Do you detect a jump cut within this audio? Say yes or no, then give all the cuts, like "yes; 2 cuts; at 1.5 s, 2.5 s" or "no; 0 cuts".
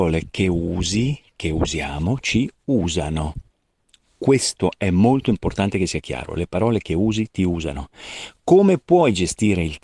no; 0 cuts